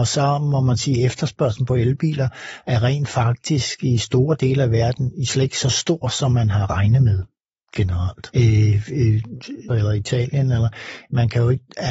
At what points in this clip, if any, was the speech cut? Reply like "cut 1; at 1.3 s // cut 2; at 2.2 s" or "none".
cut 1; at 8.3 s // cut 2; at 9.7 s